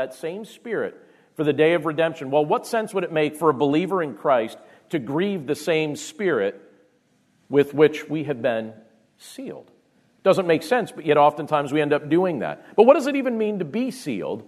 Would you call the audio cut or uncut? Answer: uncut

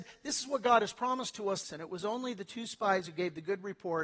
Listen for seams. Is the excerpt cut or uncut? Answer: cut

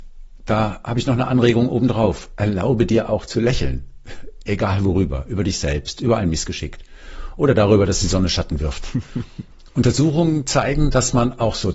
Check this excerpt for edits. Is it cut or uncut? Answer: uncut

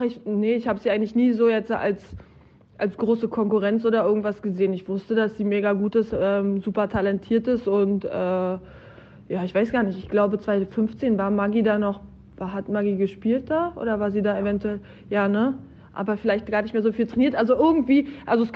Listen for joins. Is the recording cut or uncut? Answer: uncut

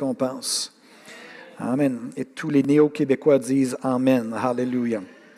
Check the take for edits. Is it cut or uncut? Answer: uncut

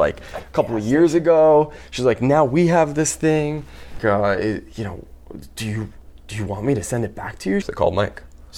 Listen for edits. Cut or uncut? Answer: cut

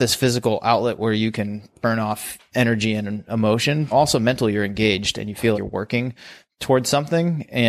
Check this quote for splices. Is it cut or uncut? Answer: cut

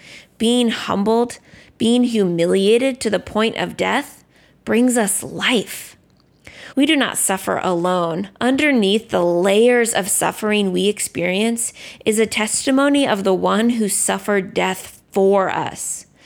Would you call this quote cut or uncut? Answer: cut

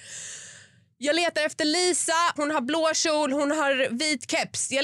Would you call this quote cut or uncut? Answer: cut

